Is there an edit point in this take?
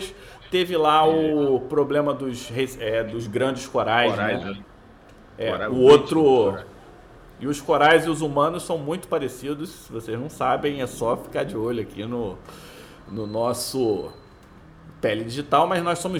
no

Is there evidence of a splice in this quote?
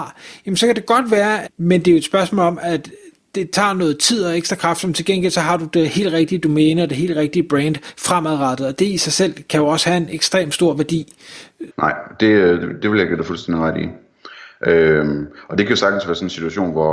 yes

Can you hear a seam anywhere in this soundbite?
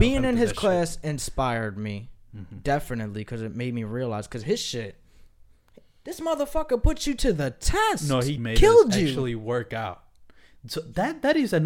yes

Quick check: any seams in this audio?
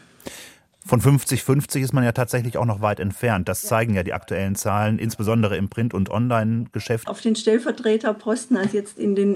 yes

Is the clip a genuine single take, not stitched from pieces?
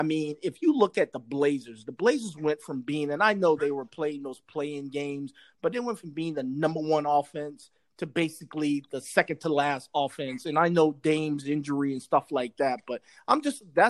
yes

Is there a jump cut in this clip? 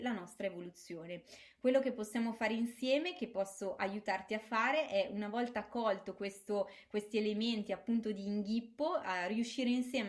no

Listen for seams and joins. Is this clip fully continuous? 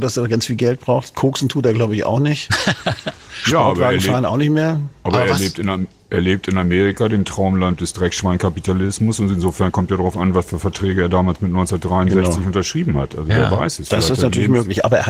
yes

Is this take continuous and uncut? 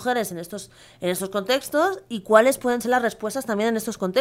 yes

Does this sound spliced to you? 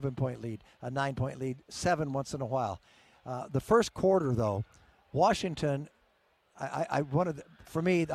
no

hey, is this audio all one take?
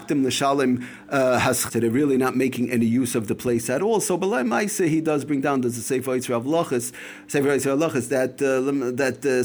no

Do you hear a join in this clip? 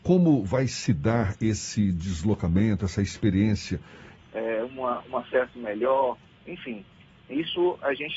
yes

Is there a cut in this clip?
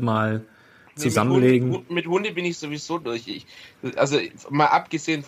no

